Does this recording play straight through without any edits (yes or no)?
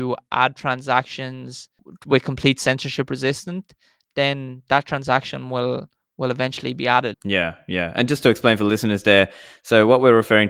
no